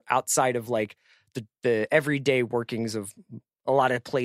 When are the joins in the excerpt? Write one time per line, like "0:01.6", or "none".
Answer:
none